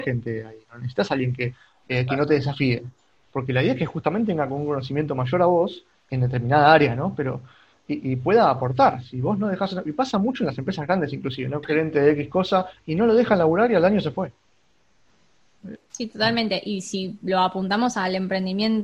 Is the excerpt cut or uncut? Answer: cut